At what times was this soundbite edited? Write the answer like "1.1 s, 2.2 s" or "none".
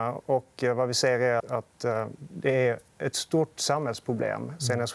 1.4 s, 2.9 s